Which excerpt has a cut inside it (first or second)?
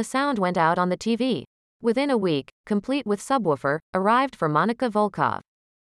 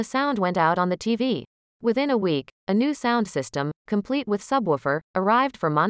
first